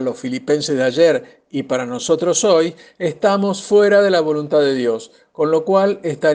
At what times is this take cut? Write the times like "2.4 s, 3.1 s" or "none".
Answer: none

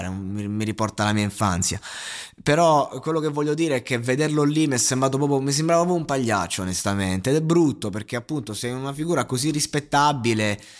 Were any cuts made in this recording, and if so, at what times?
none

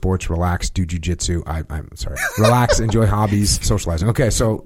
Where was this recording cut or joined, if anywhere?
2.2 s, 3.6 s

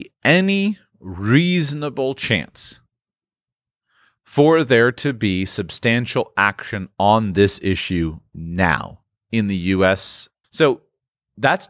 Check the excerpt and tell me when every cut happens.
10.4 s

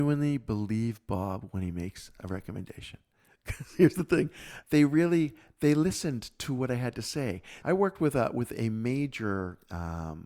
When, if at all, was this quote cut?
4.6 s, 7.6 s

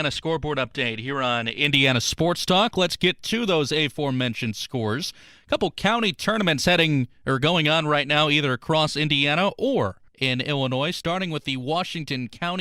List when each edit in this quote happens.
10.1 s

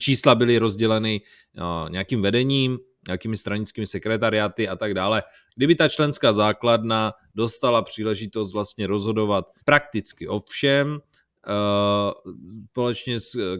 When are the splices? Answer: 5.5 s, 9.6 s

